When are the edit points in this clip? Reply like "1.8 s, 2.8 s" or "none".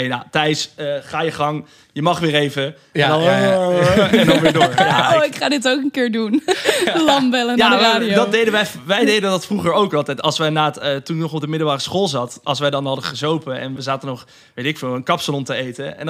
13.8 s